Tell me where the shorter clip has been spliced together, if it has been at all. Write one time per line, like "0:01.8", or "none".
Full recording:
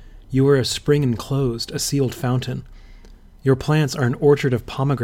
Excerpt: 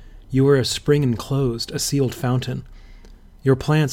none